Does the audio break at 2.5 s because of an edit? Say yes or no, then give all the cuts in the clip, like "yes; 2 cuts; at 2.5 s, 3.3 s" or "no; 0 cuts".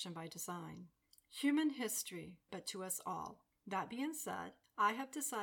yes; 1 cut; at 2.5 s